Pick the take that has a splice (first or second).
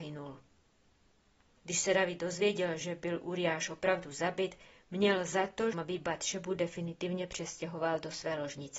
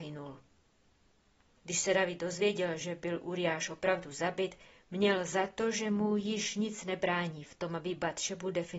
first